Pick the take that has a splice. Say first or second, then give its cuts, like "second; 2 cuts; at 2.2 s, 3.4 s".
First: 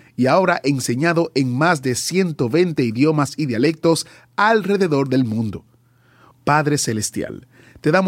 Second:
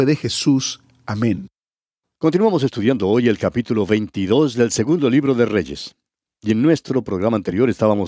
first; 1 cut; at 6.3 s